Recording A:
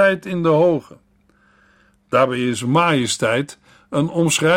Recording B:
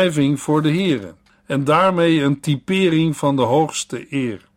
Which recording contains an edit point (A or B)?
B